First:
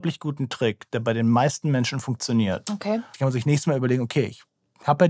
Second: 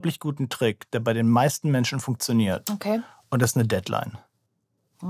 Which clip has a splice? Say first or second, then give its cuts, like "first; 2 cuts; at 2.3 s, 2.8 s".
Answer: first; 1 cut; at 3.1 s